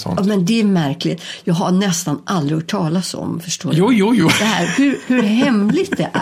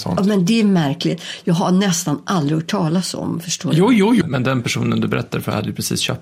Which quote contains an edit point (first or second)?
second